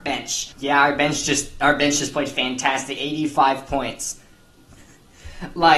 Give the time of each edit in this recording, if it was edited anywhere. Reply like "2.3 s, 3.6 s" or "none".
4.8 s